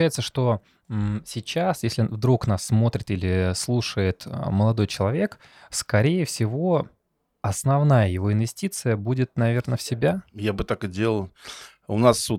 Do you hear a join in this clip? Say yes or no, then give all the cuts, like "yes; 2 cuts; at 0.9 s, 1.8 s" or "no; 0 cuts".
no; 0 cuts